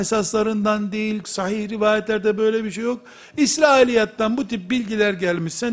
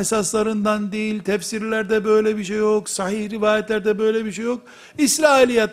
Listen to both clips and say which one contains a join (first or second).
first